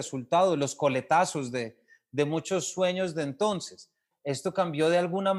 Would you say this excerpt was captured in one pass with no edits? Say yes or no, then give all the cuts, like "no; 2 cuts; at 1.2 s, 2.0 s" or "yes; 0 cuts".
no; 1 cut; at 4.1 s